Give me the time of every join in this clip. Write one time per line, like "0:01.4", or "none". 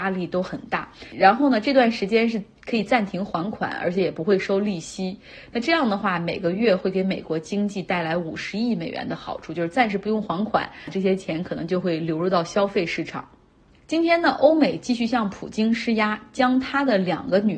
none